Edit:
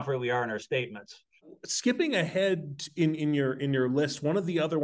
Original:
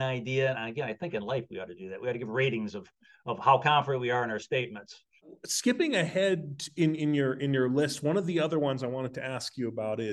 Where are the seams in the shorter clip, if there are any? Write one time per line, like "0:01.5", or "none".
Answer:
none

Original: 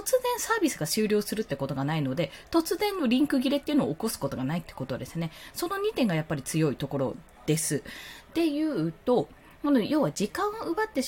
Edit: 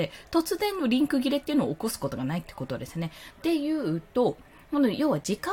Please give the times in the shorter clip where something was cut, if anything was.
0:03.3

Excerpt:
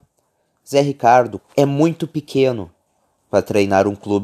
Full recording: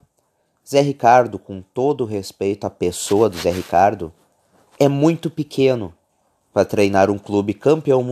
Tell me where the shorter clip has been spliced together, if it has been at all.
0:01.4

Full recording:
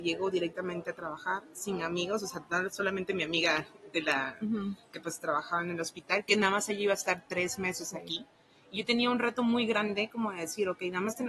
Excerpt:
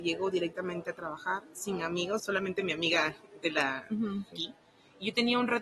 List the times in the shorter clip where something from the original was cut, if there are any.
0:02.2
0:04.3

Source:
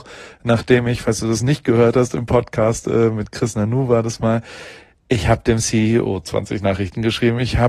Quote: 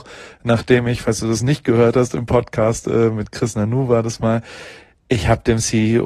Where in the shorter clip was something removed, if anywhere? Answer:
none

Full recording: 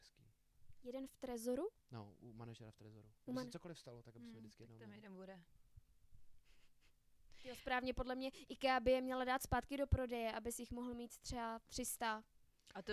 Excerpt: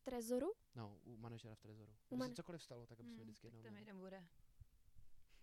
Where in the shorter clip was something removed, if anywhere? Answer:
none

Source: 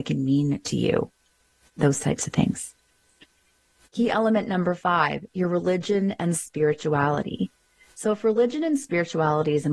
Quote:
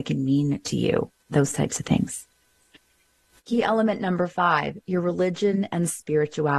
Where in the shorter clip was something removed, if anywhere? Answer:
0:01.2

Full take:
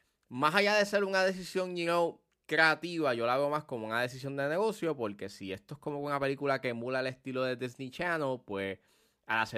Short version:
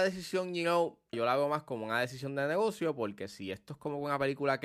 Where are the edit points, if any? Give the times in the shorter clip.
0:01.1

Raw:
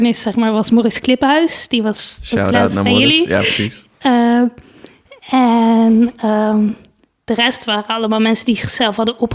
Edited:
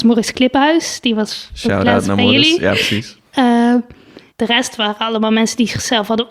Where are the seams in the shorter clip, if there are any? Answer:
0:04.3

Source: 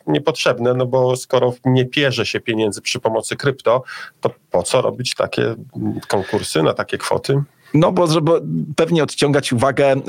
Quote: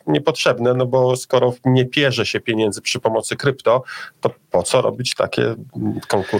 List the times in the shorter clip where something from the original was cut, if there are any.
none

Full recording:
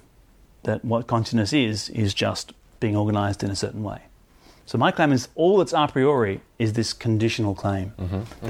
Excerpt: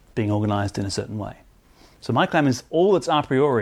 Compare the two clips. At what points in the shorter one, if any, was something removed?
none

